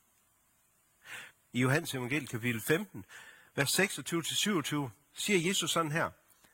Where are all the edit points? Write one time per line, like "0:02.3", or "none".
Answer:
0:01.3